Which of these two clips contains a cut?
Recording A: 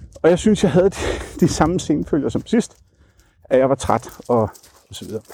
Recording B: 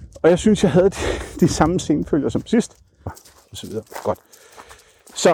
B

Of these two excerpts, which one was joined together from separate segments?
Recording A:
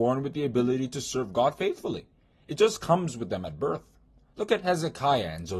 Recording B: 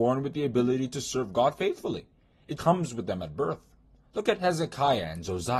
B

